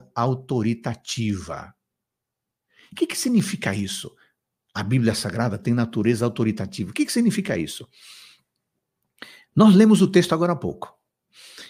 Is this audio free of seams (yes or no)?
yes